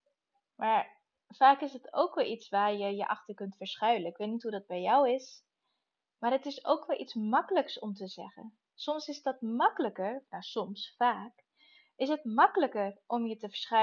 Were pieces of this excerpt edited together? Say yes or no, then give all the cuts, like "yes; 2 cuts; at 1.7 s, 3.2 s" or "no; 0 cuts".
no; 0 cuts